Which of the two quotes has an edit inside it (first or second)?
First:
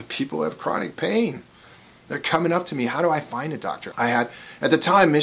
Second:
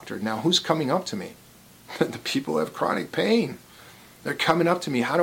first